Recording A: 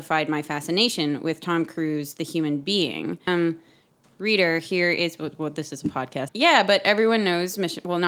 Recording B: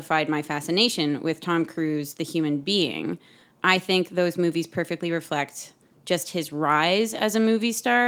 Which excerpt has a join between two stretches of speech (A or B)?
A